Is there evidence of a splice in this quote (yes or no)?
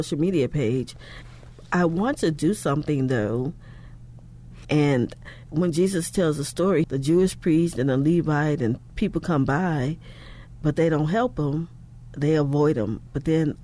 yes